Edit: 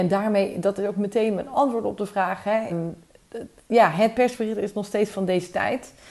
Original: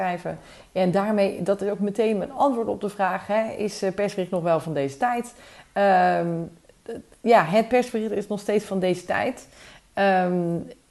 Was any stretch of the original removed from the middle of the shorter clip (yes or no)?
yes